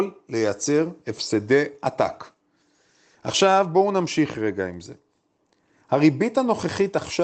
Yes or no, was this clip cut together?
no